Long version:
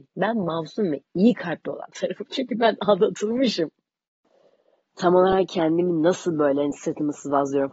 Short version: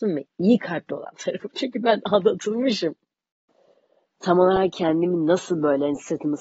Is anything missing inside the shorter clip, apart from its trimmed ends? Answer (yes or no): no